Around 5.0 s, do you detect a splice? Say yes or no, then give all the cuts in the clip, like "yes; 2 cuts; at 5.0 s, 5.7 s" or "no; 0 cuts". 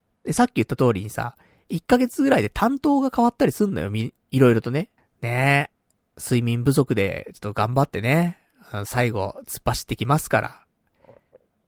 yes; 1 cut; at 5.0 s